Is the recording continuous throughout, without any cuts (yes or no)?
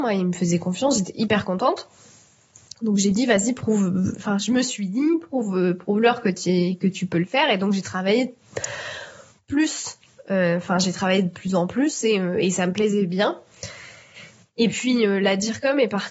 yes